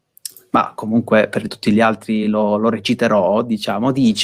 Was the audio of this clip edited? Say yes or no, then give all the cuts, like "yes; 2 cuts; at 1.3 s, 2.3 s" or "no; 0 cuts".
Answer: no; 0 cuts